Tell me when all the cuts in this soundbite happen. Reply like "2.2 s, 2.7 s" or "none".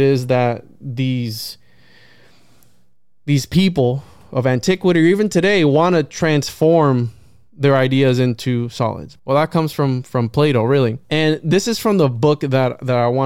9.2 s, 11.0 s